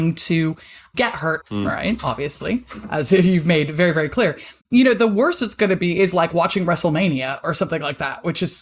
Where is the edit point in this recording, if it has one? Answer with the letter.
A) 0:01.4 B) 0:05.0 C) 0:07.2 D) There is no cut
A